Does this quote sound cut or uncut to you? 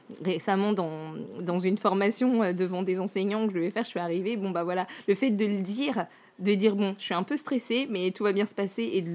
uncut